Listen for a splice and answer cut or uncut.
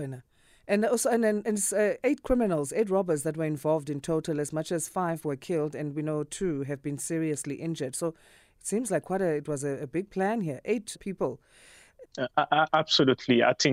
cut